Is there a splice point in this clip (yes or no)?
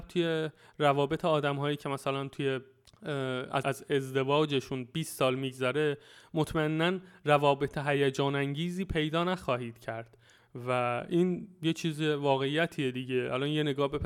yes